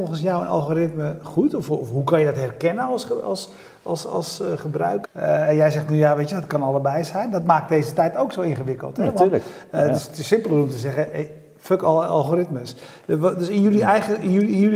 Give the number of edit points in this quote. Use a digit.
1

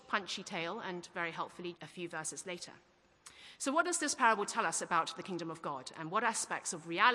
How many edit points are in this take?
1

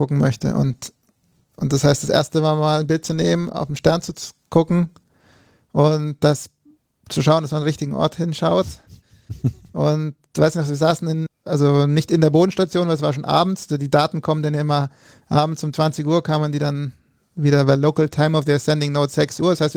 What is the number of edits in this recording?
1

